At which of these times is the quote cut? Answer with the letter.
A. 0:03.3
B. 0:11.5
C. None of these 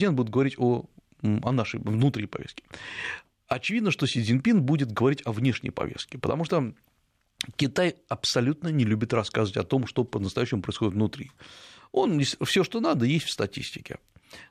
C